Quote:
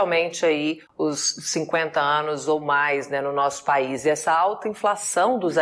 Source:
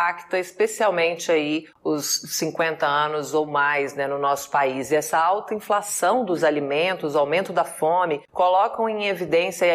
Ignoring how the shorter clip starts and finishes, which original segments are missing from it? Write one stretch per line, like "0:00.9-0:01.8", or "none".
none